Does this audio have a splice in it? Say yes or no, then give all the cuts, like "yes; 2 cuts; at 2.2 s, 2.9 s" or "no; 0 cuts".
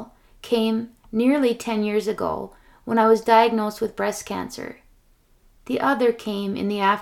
no; 0 cuts